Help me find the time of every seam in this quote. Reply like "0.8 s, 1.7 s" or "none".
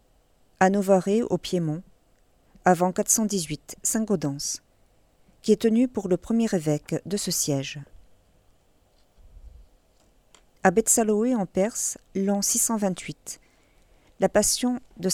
none